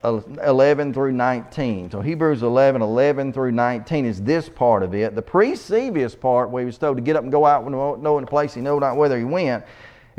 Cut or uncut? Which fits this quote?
uncut